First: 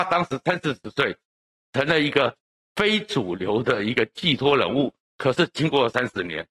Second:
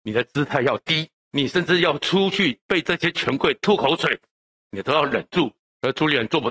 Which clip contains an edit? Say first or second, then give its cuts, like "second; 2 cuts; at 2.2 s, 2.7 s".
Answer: second; 1 cut; at 1.2 s